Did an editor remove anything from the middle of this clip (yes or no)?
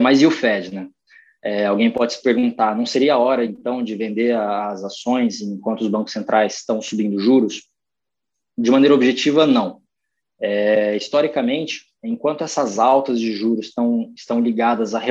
no